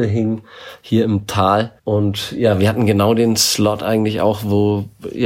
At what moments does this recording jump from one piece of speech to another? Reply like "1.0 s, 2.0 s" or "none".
1.8 s